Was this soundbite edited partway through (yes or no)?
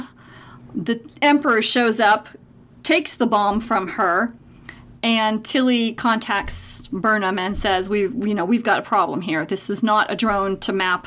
no